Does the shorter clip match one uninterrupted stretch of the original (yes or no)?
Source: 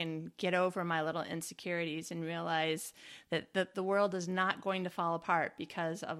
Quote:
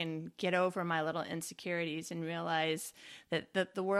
yes